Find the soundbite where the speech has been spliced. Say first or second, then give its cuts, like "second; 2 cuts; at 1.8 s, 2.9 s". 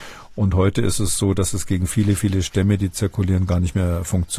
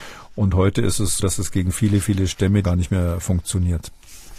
second; 2 cuts; at 1.2 s, 2.6 s